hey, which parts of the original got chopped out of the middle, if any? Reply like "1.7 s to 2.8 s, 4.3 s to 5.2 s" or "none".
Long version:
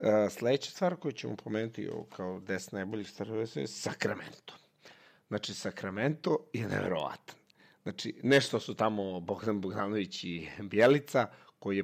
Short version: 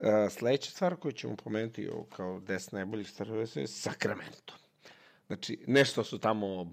5.2 s to 7.8 s

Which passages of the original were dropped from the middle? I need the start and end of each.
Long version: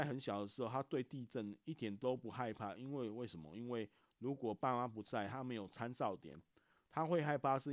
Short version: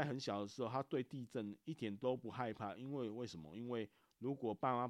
none

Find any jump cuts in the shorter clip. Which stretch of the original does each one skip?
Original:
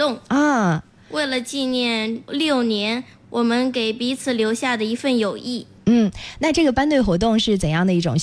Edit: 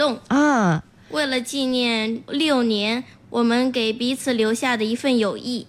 none

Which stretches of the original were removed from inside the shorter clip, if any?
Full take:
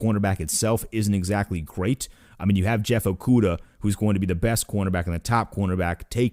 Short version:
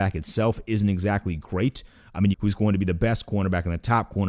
2.6 s to 3.7 s

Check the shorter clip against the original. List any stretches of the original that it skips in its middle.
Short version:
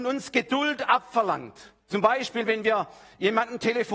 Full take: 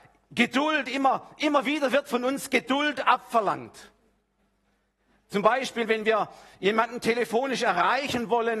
4.0 s to 5.2 s

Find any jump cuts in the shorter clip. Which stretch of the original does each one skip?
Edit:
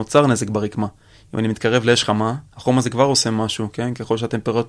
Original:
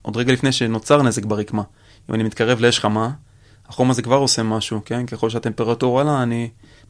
3.2 s to 3.6 s

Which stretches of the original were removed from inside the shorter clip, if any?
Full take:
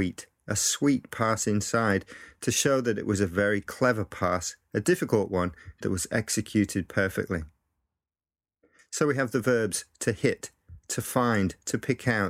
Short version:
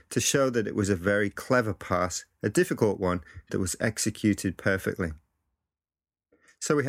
none

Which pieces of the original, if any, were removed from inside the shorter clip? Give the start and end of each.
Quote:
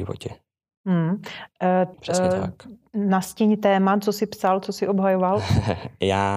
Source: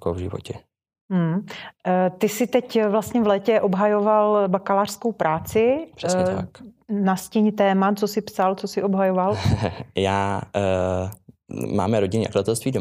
2.2 s to 5.9 s

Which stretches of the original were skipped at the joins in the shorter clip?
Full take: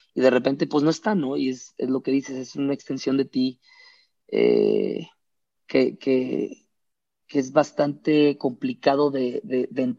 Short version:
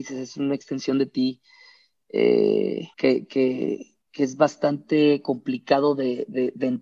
5.1 s to 5.6 s, 6.7 s to 7.2 s

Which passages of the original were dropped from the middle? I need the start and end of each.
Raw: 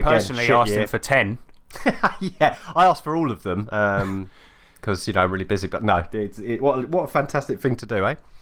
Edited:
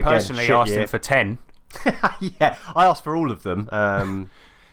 none

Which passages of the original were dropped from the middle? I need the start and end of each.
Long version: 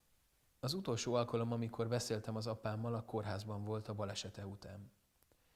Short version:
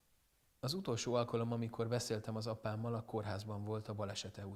none

